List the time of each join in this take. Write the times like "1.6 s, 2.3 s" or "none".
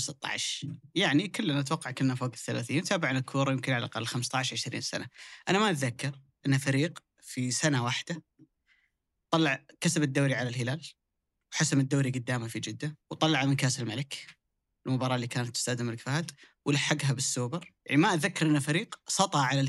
13.0 s, 17.8 s

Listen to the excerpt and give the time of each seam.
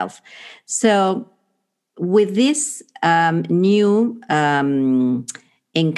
none

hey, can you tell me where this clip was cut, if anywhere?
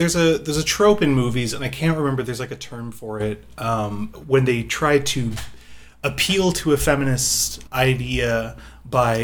4.1 s, 7.7 s

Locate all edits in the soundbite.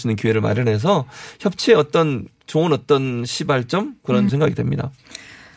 4.3 s

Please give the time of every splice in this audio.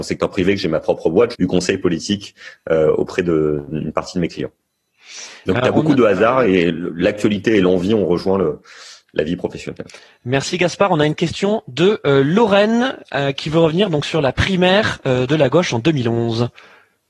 1.3 s

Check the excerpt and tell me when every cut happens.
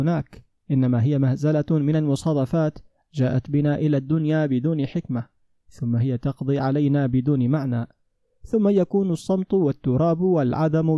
none

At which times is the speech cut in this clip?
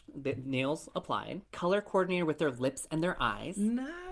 1.4 s

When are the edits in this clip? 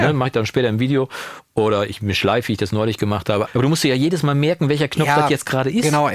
3.4 s

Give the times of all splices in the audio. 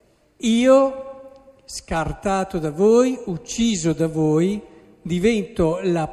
none

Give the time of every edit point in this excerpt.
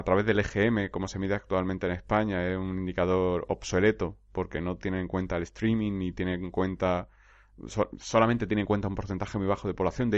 none

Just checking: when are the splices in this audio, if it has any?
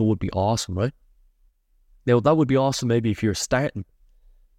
none

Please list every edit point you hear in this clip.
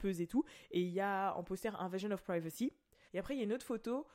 3.1 s

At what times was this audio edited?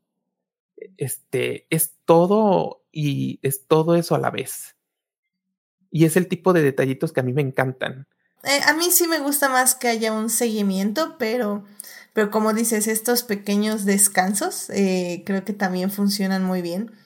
8.4 s

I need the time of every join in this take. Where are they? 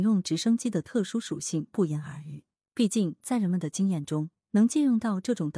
2.6 s

